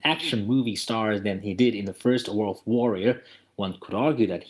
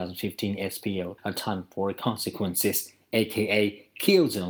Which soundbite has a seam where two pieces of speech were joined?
second; 1 cut; at 1.2 s

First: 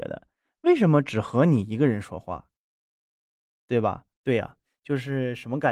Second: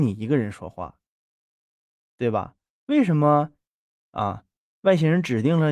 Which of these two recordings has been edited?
first; 1 cut; at 4.1 s

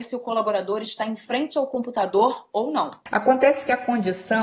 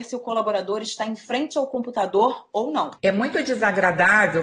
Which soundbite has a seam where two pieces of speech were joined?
second; 1 cut; at 3.0 s

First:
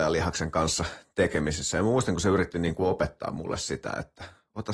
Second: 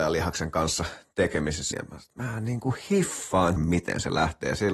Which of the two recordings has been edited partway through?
second; 2 cuts; at 1.7 s, 3.6 s

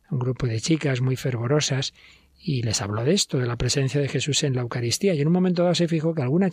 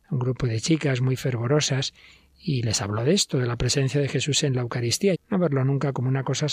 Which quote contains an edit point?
second; 1 cut; at 5.1 s

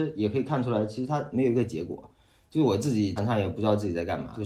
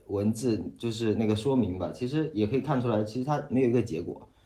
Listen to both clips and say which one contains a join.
first; 1 cut; at 3.2 s

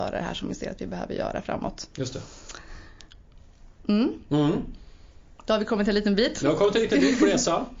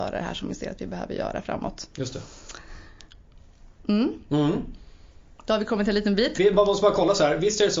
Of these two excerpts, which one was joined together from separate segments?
second; 1 cut; at 6.4 s

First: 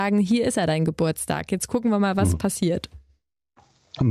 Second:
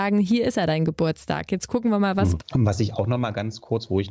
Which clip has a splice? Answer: second; 1 cut; at 2.4 s

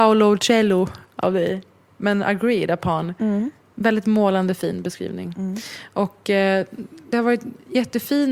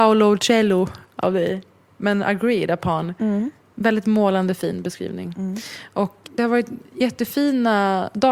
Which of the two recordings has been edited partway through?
second; 1 cut; at 6.2 s

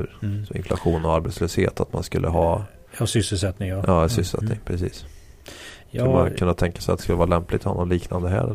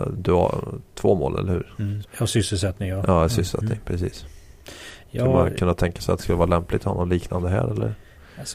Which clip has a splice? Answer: second; 1 cut; at 2.0 s

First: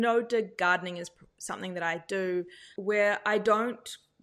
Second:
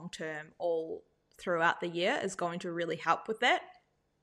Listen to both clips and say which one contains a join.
first; 1 cut; at 2.8 s

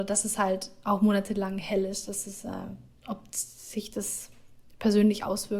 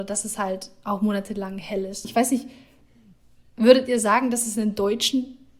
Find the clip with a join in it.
second; 1 cut; at 2.0 s

